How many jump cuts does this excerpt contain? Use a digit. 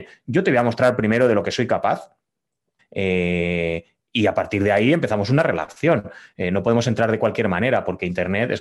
1